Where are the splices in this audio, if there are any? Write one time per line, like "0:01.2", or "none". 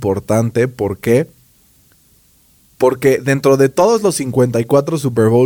none